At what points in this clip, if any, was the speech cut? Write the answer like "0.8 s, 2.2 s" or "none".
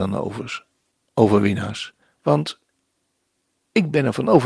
2.0 s